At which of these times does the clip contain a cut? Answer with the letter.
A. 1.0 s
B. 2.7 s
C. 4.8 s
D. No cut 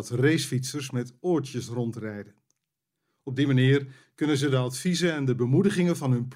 D